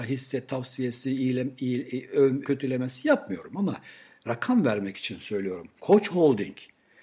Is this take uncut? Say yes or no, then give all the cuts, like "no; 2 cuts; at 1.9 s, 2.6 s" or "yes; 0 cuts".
no; 2 cuts; at 2.4 s, 5.8 s